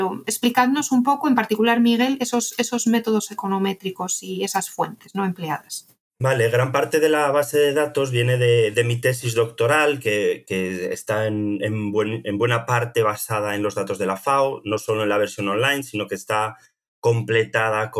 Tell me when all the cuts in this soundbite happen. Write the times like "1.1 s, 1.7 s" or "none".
none